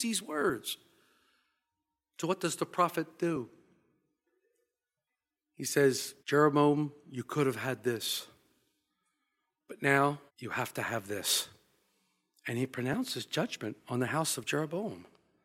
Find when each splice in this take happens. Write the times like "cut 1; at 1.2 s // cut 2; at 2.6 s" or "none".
cut 1; at 6.2 s // cut 2; at 10.3 s